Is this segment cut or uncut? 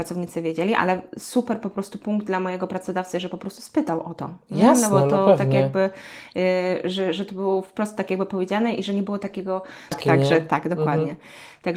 cut